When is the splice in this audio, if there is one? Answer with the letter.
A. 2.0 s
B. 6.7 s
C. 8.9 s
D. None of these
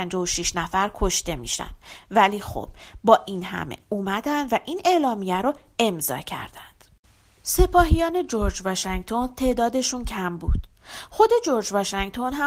D